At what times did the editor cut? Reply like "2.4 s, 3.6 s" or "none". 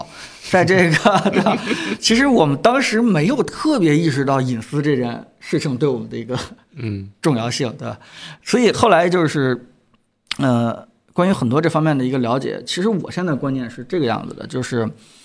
none